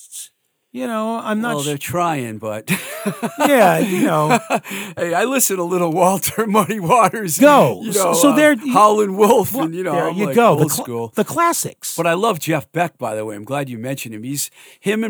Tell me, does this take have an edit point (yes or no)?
yes